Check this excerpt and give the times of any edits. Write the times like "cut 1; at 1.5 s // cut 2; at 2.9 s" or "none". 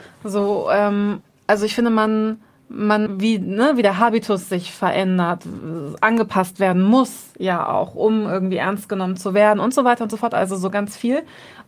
cut 1; at 3.1 s